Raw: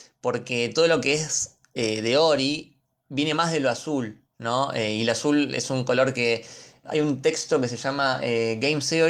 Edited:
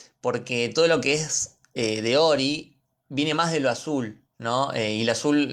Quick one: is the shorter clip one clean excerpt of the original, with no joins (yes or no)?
yes